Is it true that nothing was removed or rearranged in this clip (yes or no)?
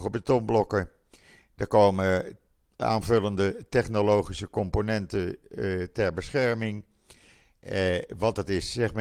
yes